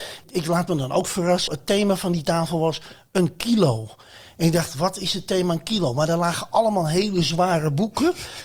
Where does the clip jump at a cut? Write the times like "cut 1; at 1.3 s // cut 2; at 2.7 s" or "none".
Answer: cut 1; at 1.5 s